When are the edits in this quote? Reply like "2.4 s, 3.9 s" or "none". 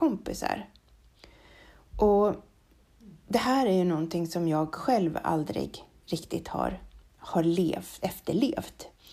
none